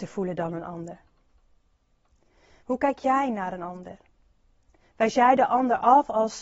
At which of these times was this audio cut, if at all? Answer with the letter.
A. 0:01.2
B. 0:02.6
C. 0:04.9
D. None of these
B